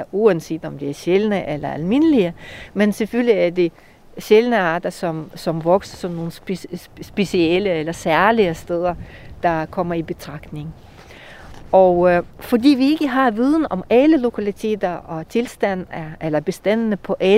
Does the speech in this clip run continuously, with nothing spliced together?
yes; 0 cuts

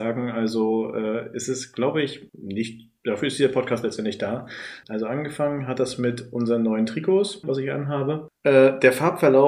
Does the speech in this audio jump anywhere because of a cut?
yes; 2 cuts; at 4.8 s, 7.4 s

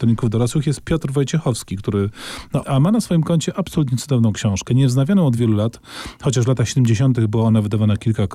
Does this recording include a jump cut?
yes; 3 cuts; at 2.6 s, 5.4 s, 7.2 s

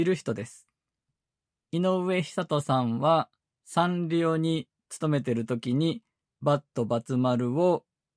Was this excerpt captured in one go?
no; 2 cuts; at 1.6 s, 6.2 s

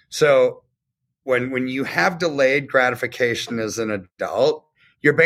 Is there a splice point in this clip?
no; 0 cuts

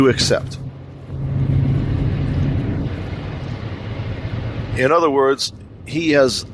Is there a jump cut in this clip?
no; 0 cuts

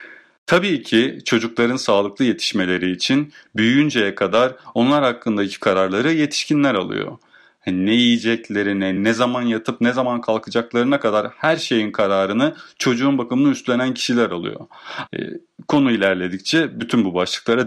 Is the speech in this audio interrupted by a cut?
yes; 2 cuts; at 9.0 s, 15.1 s

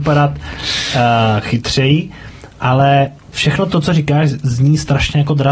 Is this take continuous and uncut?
yes; 0 cuts

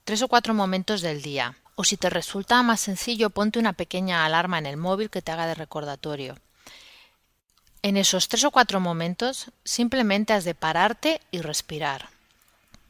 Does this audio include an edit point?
yes; 1 cut; at 1.6 s

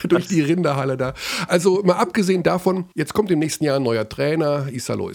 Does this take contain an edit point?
yes; 1 cut; at 2.9 s

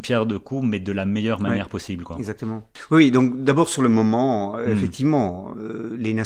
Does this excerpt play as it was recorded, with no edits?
yes; 0 cuts

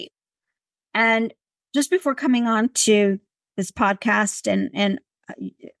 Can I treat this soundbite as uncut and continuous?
yes; 0 cuts

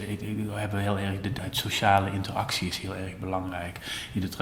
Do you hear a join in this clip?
yes; 1 cut; at 1.4 s

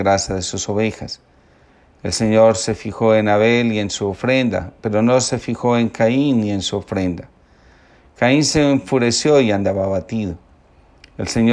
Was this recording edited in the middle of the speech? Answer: no; 0 cuts

